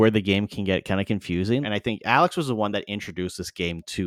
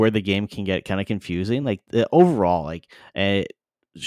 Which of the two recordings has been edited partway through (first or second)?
first